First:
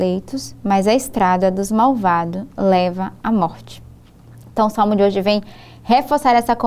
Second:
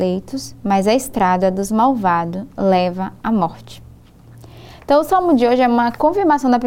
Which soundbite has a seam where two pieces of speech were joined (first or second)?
first